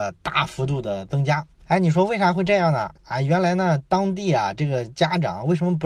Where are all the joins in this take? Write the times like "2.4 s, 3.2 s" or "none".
none